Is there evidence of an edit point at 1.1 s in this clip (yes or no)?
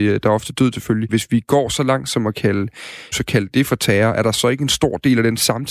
yes